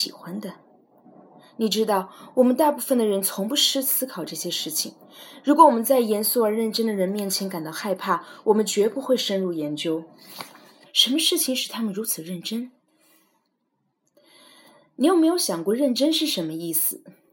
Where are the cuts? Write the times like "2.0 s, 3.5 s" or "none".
10.8 s

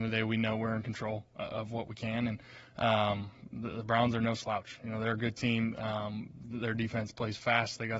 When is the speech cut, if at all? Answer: none

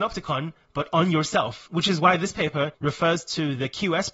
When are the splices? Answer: none

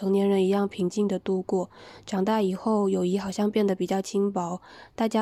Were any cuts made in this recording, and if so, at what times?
none

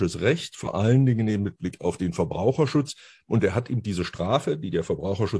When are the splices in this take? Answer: none

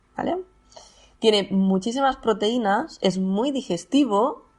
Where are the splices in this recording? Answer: none

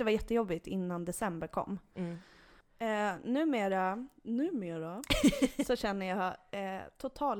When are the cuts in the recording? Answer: 2.6 s

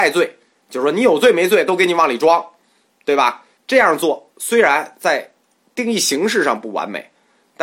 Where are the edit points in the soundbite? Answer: 3.6 s

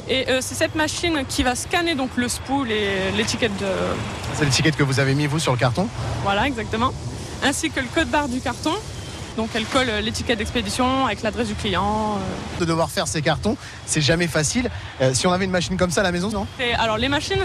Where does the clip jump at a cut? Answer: 9.3 s, 12.6 s, 16.3 s

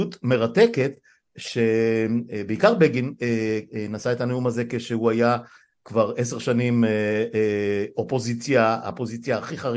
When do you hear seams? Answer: none

